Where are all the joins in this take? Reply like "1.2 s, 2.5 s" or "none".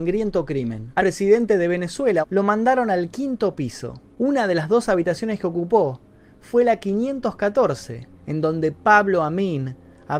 1.0 s, 2.2 s, 8.2 s